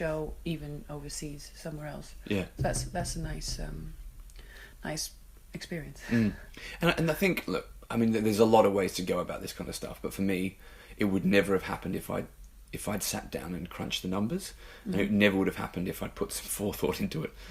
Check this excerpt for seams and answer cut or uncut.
uncut